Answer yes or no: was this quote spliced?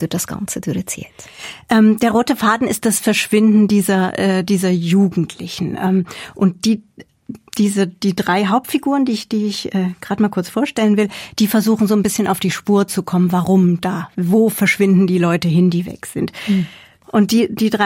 no